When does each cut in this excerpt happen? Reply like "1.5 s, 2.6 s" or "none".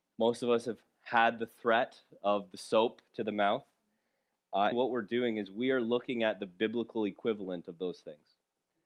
4.7 s